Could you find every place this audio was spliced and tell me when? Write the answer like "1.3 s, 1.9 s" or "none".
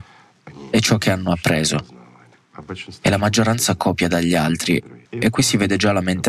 5.0 s